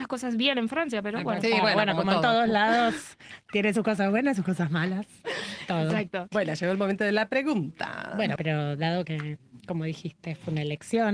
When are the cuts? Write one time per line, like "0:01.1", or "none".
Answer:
0:08.4